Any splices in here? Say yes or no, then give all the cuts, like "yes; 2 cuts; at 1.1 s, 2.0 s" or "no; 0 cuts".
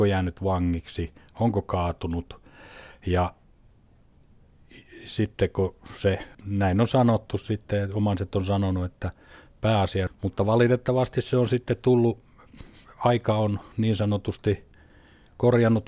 yes; 2 cuts; at 6.3 s, 10.1 s